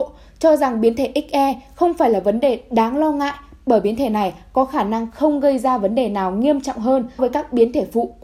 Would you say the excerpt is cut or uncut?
cut